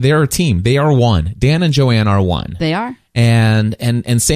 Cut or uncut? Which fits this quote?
uncut